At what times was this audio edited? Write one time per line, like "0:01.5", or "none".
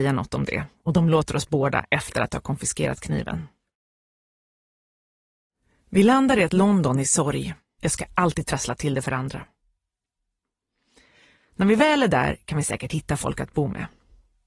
0:07.8
0:11.4